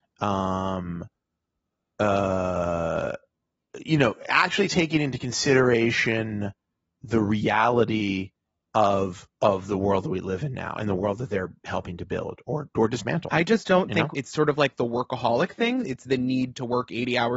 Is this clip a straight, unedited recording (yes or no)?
no